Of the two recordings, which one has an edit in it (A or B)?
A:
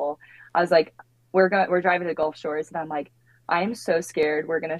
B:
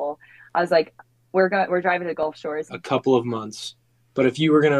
B